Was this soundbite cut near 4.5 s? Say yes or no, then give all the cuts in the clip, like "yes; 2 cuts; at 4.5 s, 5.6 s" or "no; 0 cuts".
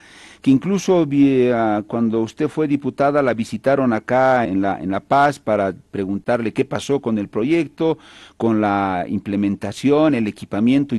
yes; 1 cut; at 4.5 s